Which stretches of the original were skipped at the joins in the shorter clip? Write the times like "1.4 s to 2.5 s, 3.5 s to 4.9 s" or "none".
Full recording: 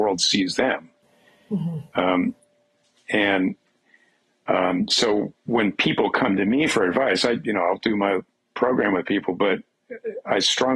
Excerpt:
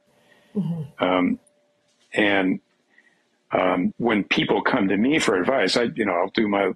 4.9 s to 5.4 s